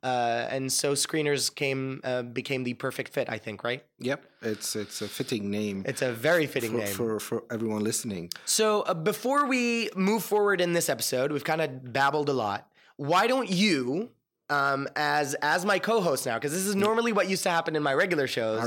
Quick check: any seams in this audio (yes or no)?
no